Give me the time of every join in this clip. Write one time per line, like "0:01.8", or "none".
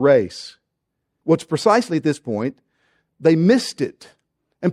0:01.2
0:03.1